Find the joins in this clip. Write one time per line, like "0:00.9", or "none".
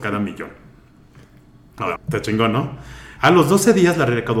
0:02.0
0:03.2